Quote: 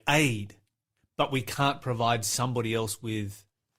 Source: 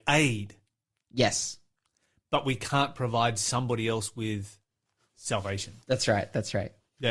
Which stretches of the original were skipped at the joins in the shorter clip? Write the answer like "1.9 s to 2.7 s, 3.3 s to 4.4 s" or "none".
1.0 s to 2.1 s